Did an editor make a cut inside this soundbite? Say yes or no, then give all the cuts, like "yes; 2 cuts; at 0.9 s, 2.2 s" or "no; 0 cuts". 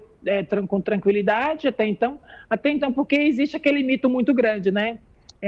no; 0 cuts